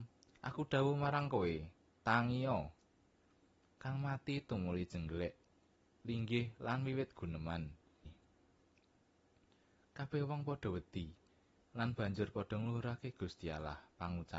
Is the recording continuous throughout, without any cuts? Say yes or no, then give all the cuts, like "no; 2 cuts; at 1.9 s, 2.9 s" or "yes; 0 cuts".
no; 1 cut; at 8.0 s